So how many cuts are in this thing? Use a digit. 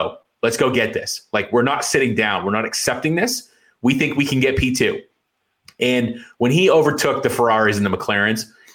0